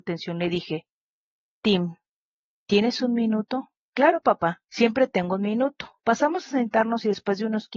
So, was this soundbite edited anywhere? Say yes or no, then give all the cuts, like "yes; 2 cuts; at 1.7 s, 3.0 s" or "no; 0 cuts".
yes; 2 cuts; at 4.7 s, 6.0 s